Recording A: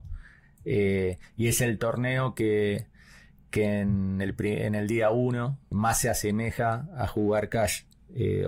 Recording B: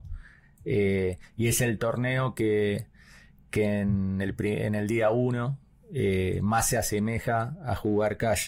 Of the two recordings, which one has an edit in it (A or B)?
A